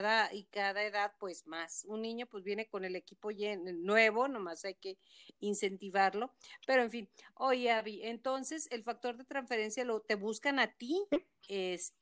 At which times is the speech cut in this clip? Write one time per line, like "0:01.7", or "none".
none